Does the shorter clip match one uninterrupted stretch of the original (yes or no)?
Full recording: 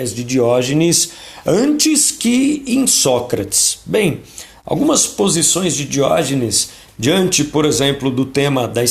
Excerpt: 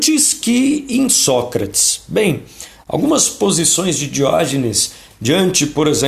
yes